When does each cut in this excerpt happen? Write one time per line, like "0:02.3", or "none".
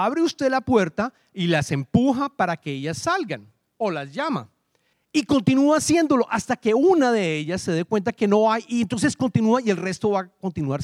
0:04.9